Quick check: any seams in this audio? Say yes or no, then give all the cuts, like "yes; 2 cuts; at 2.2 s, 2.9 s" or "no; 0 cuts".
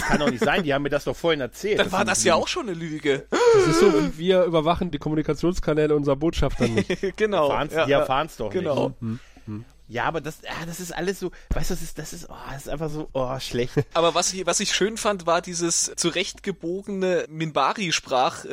no; 0 cuts